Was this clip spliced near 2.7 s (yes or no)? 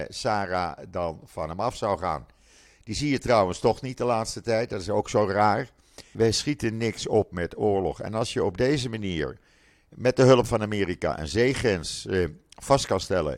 no